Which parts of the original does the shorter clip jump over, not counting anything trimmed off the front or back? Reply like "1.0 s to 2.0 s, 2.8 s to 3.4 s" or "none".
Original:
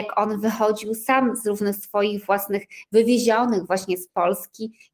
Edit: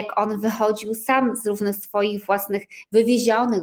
none